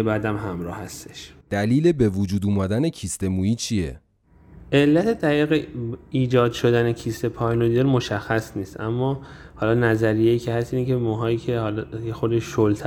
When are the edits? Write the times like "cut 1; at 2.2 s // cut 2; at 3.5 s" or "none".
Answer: cut 1; at 1.4 s